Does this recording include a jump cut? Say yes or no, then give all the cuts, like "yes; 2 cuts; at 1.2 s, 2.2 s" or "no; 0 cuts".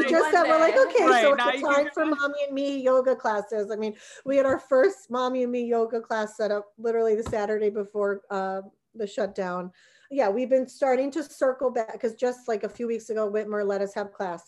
no; 0 cuts